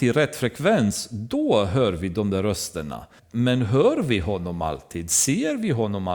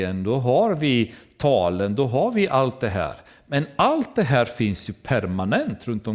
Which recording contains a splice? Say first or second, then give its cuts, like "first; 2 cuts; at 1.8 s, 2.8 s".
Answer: first; 1 cut; at 3.2 s